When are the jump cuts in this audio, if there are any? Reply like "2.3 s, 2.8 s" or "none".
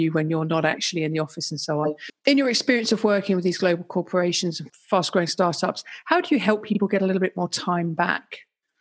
2.1 s, 4.7 s